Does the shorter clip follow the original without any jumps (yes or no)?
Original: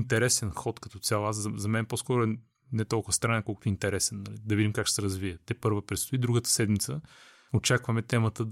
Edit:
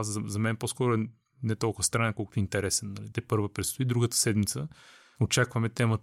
no